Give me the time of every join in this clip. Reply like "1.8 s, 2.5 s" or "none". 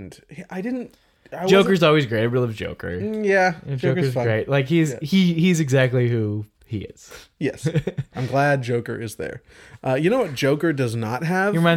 none